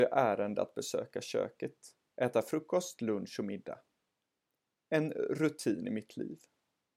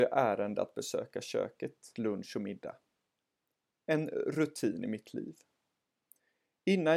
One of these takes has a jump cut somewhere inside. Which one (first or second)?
second